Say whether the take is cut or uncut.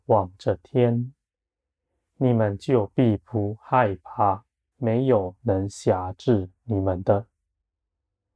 cut